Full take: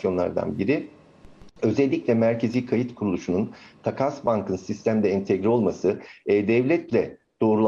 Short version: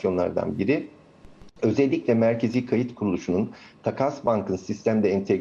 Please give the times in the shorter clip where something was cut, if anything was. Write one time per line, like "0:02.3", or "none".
none